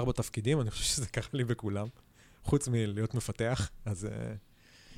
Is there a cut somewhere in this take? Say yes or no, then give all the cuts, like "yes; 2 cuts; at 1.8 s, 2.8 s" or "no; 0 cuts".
no; 0 cuts